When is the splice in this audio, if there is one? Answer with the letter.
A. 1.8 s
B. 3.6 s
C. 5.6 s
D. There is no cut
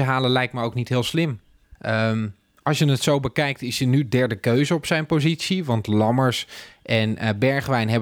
A